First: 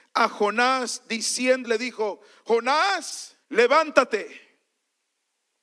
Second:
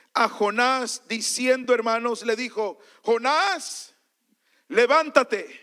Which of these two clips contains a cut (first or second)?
first